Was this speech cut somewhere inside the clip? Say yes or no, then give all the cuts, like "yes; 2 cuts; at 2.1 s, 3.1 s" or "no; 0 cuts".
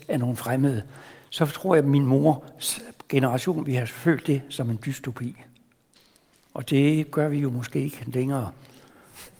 no; 0 cuts